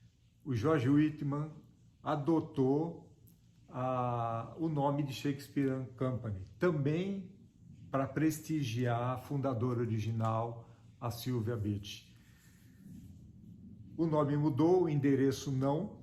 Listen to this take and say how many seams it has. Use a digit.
0